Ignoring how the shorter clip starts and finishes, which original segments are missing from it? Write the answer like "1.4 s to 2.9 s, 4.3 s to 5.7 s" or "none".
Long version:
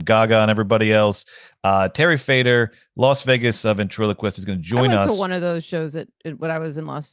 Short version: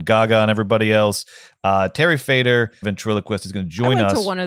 2.8 s to 3.8 s